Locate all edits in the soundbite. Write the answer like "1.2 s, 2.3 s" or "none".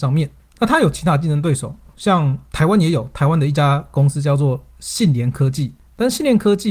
none